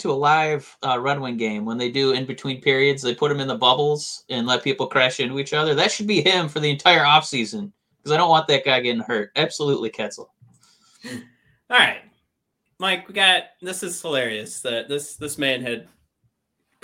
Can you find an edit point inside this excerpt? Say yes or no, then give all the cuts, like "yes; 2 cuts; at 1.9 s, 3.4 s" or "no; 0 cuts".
no; 0 cuts